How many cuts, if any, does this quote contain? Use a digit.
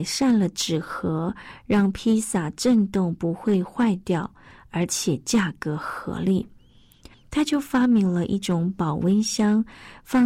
1